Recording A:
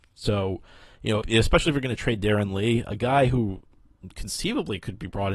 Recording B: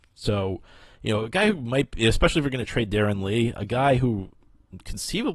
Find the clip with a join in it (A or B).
A